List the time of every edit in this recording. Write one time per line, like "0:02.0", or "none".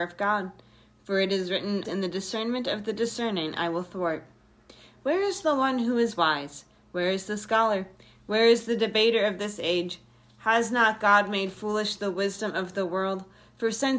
0:01.8